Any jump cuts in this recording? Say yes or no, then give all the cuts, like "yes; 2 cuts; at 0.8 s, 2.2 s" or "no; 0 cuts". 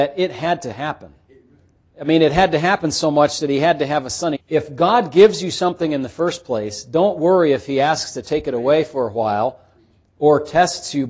yes; 1 cut; at 4.3 s